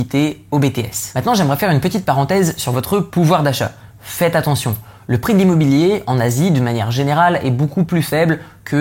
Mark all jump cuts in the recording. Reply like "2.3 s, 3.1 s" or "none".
none